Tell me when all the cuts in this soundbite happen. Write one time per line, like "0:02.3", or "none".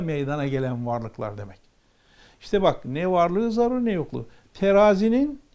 none